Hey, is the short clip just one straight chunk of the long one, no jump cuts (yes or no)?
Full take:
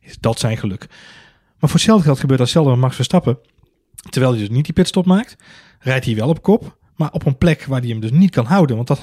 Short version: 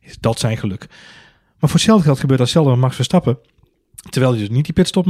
yes